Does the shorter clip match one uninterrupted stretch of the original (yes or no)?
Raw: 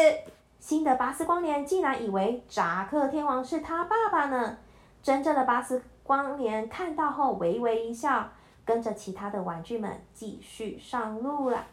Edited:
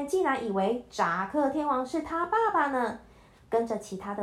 no